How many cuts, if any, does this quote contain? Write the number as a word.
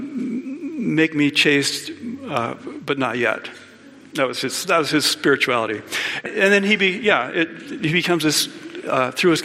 one